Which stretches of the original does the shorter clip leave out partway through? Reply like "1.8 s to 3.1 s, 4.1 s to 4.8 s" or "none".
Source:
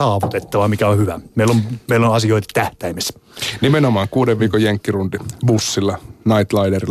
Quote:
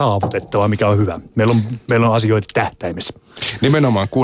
none